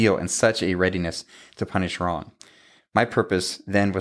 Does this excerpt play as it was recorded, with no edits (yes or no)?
no